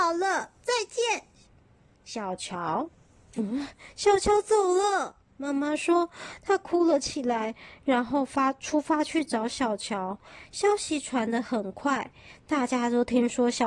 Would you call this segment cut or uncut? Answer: uncut